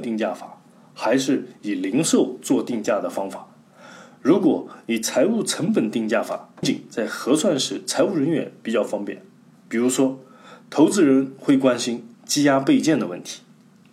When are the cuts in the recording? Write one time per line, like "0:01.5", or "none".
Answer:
0:06.6